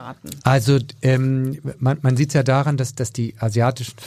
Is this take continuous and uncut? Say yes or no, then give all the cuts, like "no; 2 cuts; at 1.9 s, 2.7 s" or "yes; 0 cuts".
yes; 0 cuts